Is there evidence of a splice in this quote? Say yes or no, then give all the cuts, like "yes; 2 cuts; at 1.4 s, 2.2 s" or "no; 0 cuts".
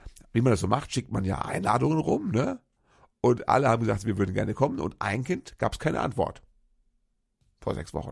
no; 0 cuts